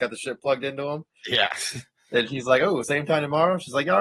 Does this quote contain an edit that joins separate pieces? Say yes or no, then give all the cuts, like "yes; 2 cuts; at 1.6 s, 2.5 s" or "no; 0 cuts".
no; 0 cuts